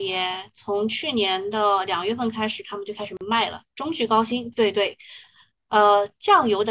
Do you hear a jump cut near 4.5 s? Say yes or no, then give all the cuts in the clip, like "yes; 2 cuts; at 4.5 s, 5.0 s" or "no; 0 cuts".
yes; 1 cut; at 4.5 s